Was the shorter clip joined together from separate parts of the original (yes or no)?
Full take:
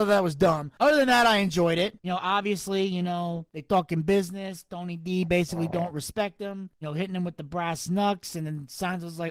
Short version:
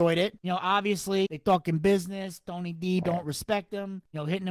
yes